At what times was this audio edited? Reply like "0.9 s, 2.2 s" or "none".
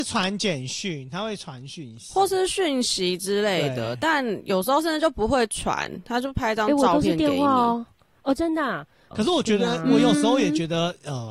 9.1 s